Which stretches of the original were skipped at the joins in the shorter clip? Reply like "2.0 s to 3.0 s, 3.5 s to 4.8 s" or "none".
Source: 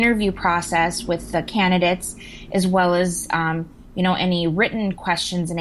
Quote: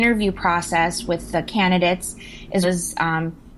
2.6 s to 3.0 s